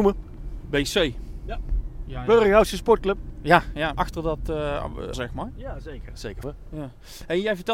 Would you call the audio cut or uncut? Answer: cut